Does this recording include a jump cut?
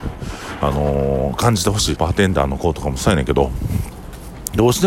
yes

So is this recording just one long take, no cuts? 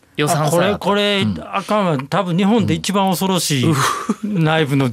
yes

